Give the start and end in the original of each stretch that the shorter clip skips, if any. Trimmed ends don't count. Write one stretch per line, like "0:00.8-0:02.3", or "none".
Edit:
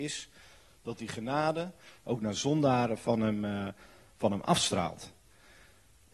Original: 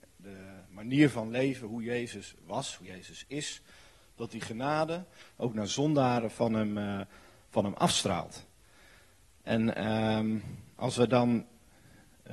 none